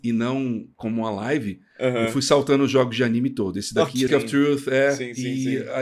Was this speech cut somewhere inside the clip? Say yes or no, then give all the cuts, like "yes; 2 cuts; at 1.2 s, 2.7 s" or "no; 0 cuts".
yes; 1 cut; at 4.1 s